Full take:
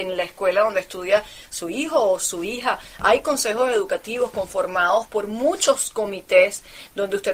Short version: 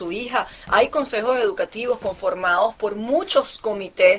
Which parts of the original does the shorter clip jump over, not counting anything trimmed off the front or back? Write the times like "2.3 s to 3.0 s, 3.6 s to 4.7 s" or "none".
none

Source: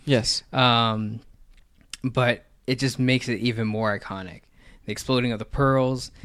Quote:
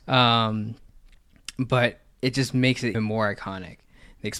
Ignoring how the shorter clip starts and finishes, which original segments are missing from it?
3.4 s to 3.6 s

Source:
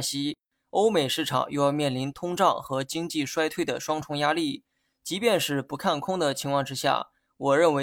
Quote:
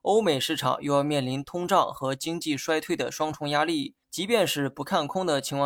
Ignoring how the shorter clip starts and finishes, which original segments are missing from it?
4.7 s to 5.0 s

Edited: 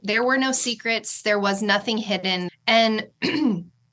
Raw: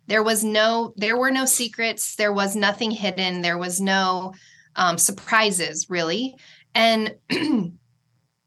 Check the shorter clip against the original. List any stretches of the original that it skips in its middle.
3.4 s to 6.6 s

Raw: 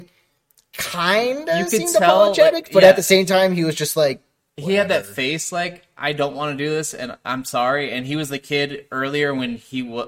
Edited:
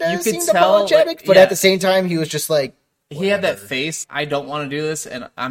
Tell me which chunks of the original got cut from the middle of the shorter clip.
5.5 s to 5.9 s

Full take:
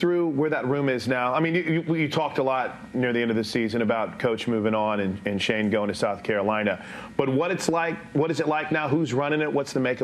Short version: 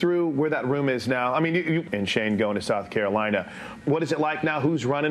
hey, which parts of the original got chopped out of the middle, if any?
1.9 s to 5.2 s, 7.1 s to 8.1 s

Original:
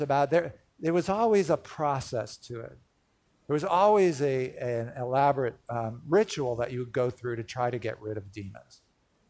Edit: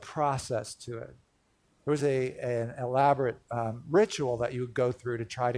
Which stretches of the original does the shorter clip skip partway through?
3.6 s to 4.2 s

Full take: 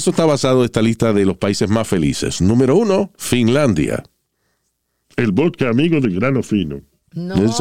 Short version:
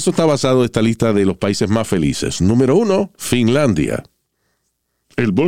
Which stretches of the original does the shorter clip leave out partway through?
none

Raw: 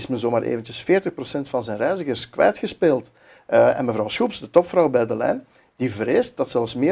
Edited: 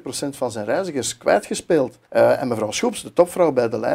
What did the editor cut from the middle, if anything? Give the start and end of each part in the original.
3.2 s to 3.4 s

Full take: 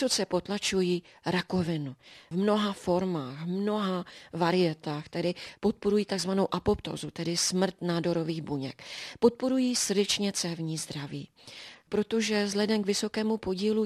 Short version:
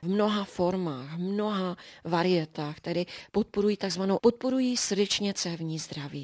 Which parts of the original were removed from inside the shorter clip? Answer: 6.5 s to 9.2 s

